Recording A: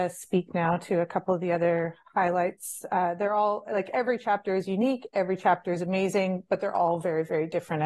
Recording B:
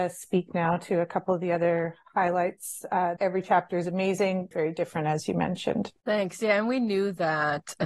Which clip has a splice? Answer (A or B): B